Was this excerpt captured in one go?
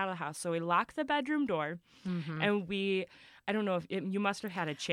yes; 0 cuts

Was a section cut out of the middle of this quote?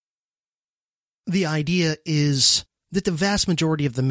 yes; 1 cut; at 1.1 s

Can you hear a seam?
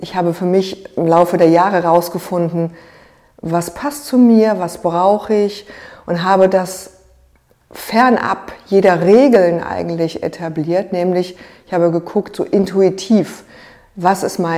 no; 0 cuts

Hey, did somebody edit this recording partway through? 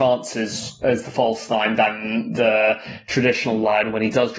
no; 0 cuts

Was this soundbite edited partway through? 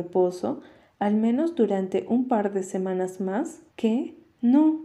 yes; 1 cut; at 3.7 s

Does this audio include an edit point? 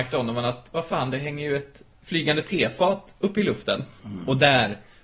yes; 1 cut; at 4.0 s

